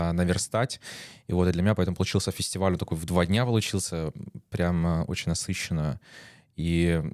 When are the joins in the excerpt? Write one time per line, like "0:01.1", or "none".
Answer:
none